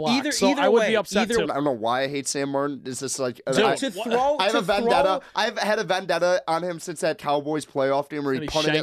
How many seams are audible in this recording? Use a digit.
1